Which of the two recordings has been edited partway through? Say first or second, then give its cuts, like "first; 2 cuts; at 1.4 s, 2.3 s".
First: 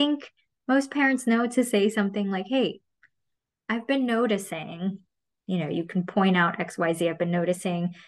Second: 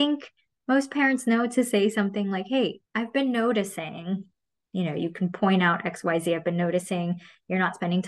second; 1 cut; at 2.9 s